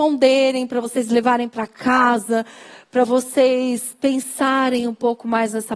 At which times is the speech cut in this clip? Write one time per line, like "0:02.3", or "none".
none